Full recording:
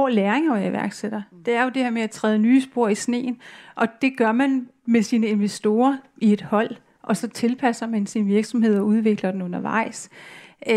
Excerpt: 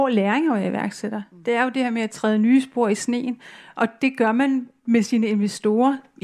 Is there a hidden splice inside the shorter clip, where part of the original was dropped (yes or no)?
no